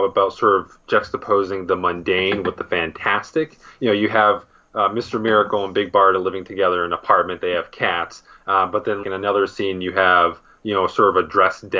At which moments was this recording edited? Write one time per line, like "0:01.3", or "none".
0:09.0